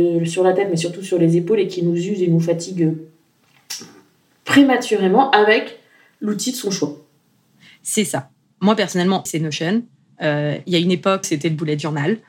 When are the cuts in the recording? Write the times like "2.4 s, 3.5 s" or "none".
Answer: 9.3 s, 11.2 s